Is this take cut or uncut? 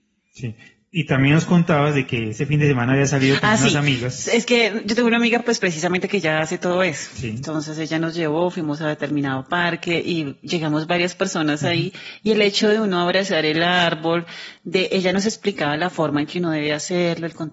uncut